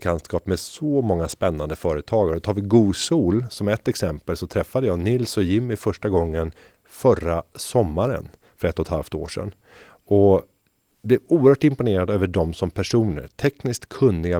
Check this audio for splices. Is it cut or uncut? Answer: uncut